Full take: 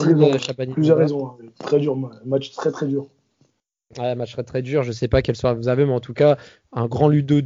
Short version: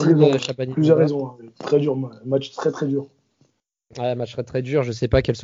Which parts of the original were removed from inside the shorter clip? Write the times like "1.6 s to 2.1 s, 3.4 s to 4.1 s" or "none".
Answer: none